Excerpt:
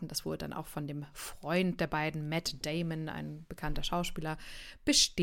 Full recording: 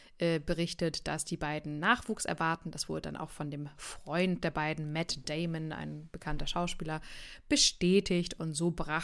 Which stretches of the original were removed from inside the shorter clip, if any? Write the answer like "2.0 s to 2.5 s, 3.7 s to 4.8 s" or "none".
none

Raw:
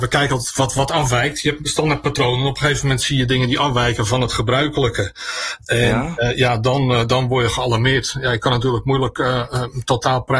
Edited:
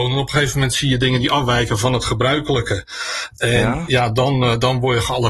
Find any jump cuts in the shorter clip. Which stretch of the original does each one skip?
6.2 s to 6.4 s

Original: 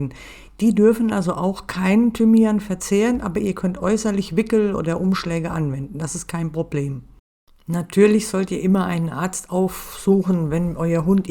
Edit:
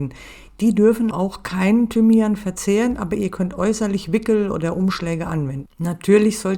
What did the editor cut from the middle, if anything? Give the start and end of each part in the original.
1.1 s to 1.3 s, 5.9 s to 7.5 s

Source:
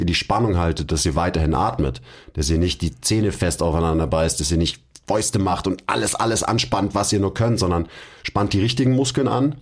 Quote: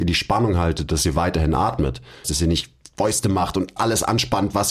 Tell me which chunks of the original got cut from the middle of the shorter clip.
2.2 s to 4.3 s, 5.9 s to 6.2 s

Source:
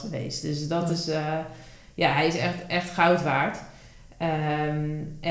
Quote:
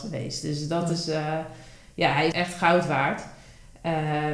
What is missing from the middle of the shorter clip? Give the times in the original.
2.3 s to 2.7 s

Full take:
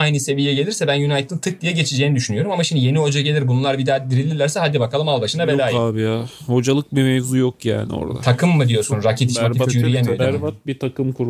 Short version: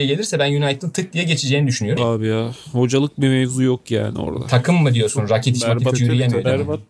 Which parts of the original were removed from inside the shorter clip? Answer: 2.5 s to 5.7 s

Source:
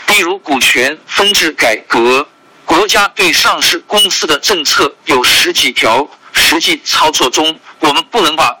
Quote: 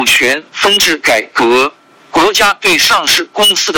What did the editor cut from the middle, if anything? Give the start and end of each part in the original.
none

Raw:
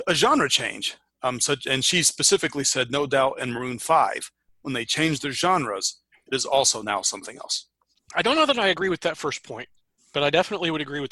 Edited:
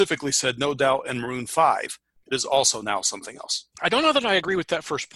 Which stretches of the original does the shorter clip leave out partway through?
4.5 s to 6.2 s, 7.7 s to 8.1 s

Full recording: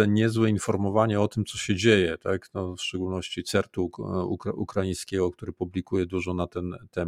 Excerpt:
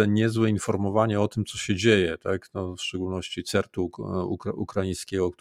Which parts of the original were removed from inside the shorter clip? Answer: none

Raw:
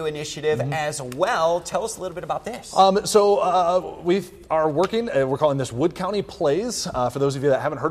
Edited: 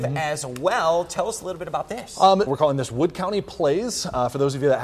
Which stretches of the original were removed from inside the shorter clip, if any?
3.0 s to 5.3 s

